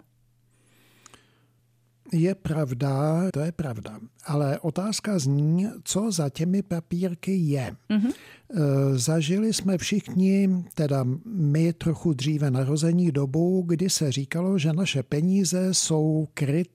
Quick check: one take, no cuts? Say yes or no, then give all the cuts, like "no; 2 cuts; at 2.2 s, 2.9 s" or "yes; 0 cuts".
no; 1 cut; at 3.3 s